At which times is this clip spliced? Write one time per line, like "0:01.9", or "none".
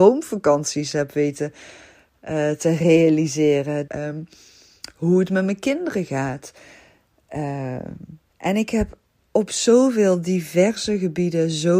0:03.9
0:08.3